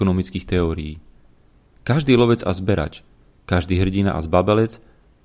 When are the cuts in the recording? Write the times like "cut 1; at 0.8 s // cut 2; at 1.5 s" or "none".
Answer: none